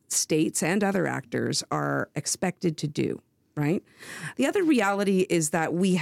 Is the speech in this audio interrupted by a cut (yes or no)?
yes